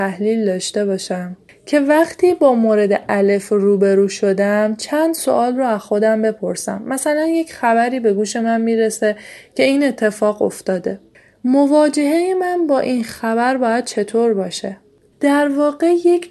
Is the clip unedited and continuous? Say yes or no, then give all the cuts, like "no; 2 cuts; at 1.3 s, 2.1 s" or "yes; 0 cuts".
no; 1 cut; at 15.1 s